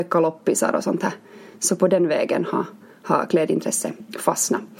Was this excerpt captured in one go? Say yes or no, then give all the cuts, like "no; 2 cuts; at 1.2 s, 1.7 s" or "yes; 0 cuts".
yes; 0 cuts